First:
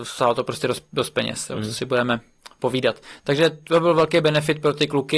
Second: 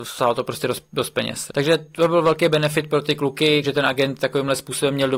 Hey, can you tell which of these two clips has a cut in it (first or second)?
second